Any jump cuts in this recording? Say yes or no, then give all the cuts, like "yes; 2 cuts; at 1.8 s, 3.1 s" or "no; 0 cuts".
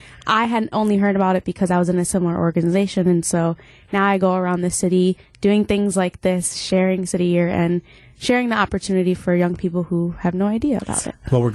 no; 0 cuts